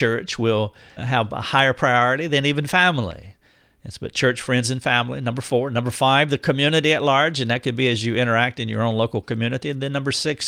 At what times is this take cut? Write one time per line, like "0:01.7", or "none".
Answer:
0:01.0